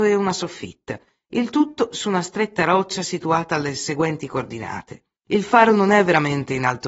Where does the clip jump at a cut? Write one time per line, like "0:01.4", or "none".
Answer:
0:05.2